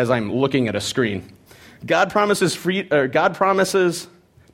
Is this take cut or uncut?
uncut